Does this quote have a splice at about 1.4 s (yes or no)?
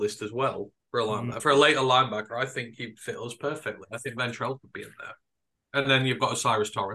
no